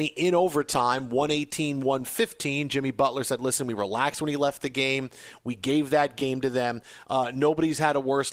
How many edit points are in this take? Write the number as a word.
zero